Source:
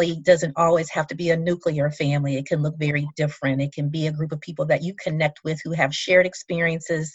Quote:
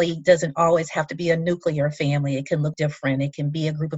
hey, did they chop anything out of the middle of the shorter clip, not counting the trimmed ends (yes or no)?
yes